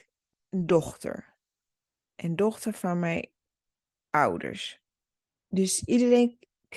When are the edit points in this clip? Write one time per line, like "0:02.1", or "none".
0:05.3